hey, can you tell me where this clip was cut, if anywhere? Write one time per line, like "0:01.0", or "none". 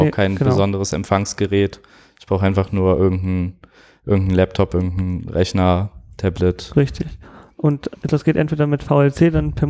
none